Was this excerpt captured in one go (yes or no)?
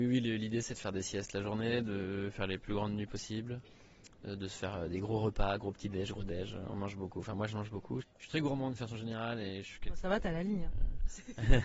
no